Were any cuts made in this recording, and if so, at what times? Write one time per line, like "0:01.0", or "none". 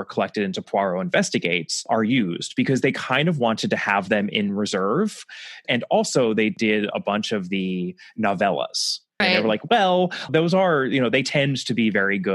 0:05.6
0:09.2
0:10.3